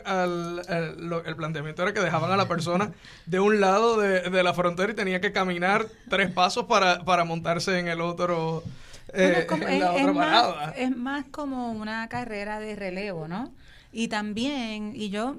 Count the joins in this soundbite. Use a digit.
0